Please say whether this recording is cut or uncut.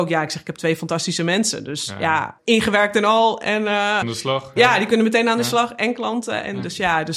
cut